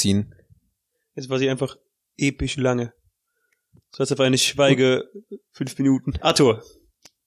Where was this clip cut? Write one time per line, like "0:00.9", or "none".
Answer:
0:06.2